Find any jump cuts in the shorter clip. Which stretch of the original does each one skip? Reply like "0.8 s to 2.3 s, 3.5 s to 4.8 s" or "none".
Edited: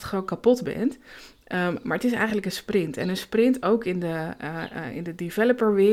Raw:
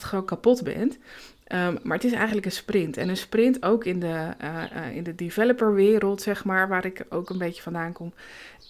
none